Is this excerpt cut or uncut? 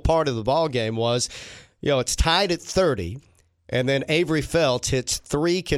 uncut